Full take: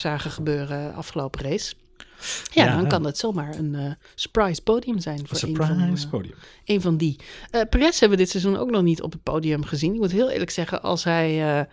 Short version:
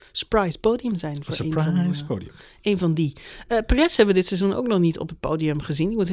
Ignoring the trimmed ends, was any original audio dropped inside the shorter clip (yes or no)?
no